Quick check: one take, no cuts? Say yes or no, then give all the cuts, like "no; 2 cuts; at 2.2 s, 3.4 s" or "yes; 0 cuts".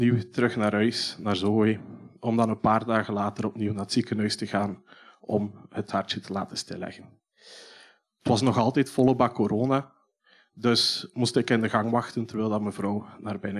yes; 0 cuts